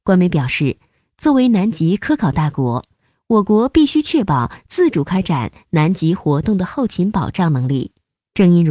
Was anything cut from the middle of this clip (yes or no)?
no